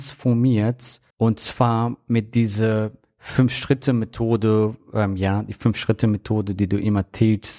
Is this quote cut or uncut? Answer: cut